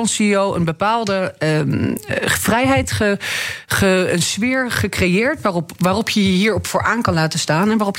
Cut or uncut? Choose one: uncut